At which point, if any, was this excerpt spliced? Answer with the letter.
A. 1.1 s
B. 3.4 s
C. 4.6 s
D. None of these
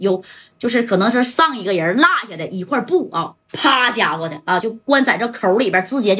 D